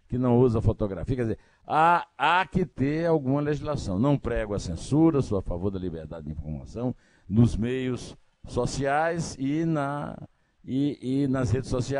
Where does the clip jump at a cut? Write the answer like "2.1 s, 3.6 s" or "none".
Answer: none